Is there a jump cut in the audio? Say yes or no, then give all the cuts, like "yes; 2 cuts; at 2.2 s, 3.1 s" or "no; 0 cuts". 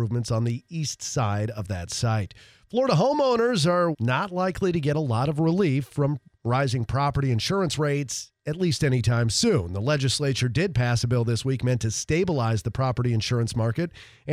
yes; 1 cut; at 3.9 s